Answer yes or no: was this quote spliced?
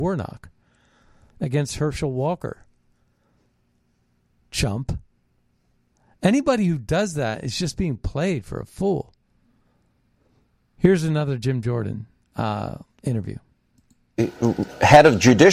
no